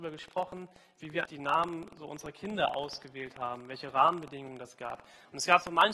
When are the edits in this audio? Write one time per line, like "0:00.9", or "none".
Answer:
0:01.2